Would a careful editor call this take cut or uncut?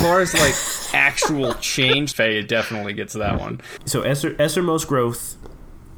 cut